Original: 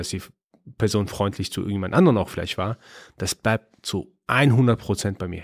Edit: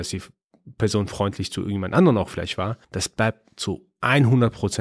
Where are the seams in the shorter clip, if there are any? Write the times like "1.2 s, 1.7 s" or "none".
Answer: 2.8 s